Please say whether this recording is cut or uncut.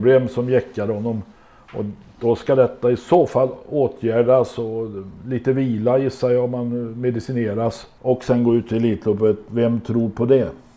uncut